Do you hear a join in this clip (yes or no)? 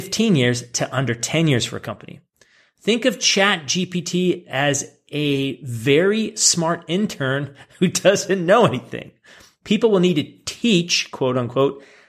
no